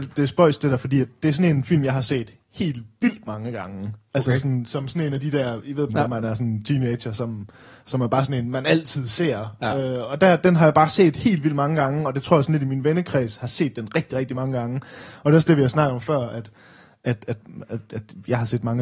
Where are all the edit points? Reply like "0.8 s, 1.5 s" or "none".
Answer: 5.9 s